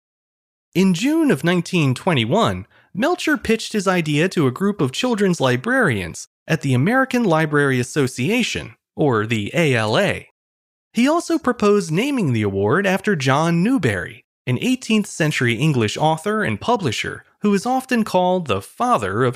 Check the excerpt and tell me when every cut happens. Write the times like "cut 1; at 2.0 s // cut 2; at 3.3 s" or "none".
none